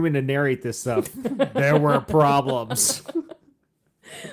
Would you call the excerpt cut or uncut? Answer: uncut